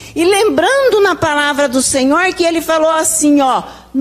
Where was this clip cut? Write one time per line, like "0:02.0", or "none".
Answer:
none

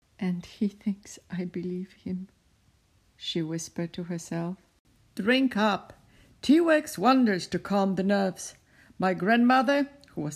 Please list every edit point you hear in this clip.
none

